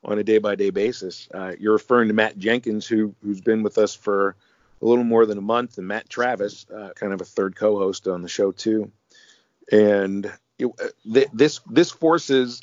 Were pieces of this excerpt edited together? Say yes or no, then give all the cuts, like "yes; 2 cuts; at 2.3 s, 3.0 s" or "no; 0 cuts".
yes; 1 cut; at 6.9 s